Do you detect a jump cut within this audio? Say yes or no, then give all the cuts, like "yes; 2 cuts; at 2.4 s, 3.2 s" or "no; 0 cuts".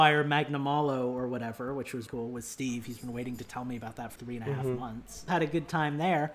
yes; 3 cuts; at 2.1 s, 4.2 s, 5.3 s